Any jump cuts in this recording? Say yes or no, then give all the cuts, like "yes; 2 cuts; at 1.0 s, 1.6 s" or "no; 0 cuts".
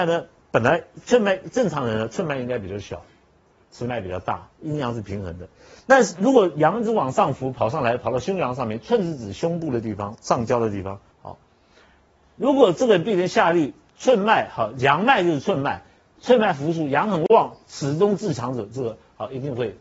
yes; 1 cut; at 11.1 s